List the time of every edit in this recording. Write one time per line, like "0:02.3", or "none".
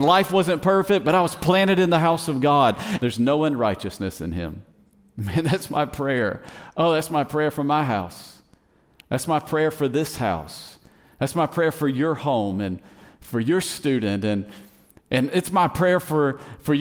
0:03.0